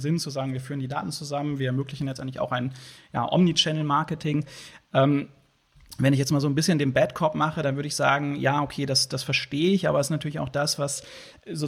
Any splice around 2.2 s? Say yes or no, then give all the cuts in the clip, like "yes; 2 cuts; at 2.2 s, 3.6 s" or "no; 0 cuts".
no; 0 cuts